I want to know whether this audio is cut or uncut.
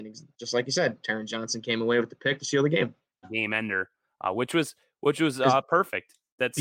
cut